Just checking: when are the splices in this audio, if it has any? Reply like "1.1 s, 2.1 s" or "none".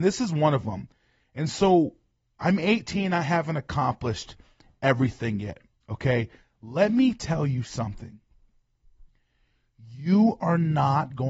none

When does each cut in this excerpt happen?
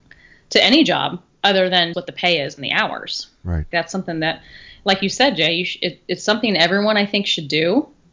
1.9 s, 3.7 s

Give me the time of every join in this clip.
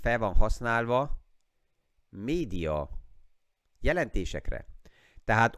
none

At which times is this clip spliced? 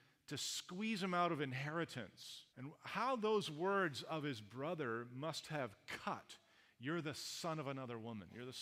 2.5 s

